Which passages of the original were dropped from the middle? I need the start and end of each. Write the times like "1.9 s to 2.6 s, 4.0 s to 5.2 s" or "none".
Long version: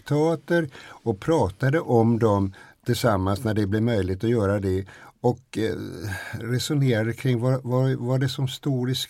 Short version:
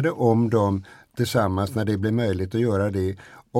none